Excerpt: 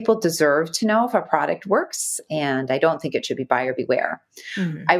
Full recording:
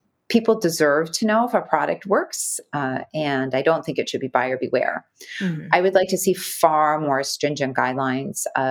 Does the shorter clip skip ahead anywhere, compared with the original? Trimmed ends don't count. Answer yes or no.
yes